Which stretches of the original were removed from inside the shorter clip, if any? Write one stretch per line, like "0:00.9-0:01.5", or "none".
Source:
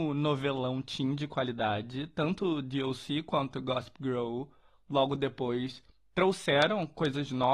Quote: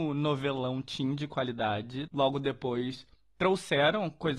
0:02.1-0:04.8